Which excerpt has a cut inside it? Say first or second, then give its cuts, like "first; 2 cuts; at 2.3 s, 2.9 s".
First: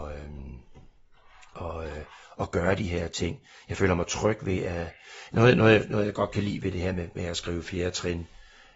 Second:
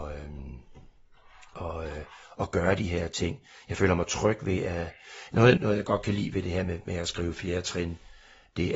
second; 1 cut; at 5.6 s